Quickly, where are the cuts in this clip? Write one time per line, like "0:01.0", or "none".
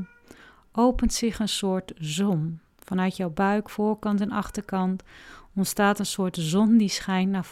none